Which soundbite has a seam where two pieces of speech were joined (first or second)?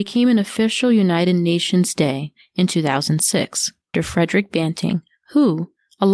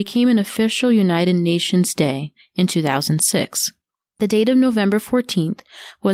first